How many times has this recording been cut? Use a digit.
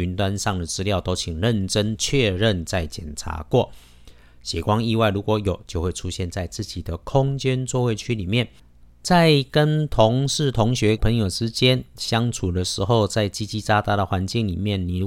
2